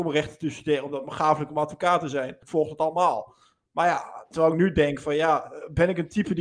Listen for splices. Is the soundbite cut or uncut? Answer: cut